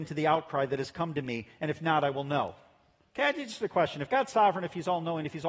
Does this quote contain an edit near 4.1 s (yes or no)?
no